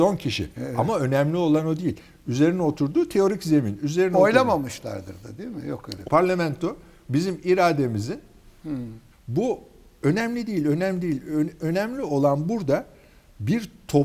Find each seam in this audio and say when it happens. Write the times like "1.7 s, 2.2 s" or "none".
6.0 s, 9.1 s